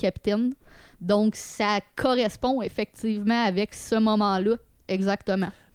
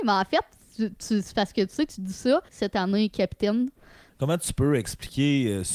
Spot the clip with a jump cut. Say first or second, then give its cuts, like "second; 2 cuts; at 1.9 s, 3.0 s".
second; 2 cuts; at 2.5 s, 4.1 s